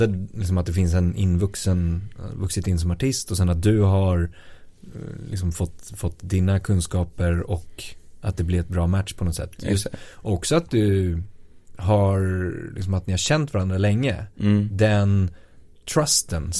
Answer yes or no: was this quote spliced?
no